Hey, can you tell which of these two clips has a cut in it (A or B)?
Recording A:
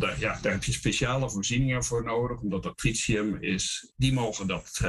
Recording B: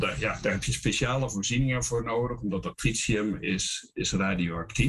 A